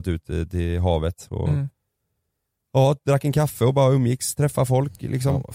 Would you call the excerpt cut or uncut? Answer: uncut